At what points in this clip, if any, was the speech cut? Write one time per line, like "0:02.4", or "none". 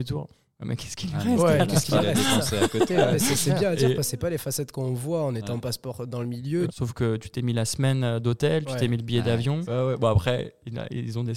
0:06.7
0:09.6